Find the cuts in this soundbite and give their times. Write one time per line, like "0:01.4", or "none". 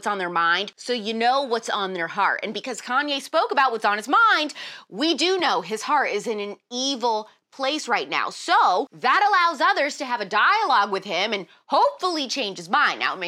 none